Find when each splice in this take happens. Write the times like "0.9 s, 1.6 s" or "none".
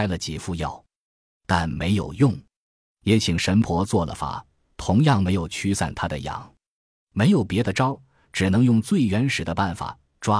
none